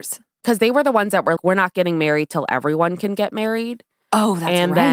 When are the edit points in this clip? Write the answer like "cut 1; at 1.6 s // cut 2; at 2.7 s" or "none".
cut 1; at 1.4 s